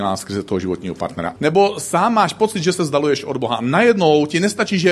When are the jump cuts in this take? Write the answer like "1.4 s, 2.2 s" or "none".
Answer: 1.4 s